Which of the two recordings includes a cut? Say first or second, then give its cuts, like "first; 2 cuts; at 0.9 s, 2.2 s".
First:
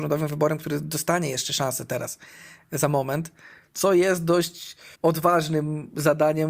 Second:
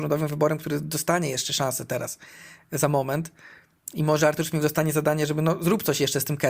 first; 2 cuts; at 3.7 s, 4.9 s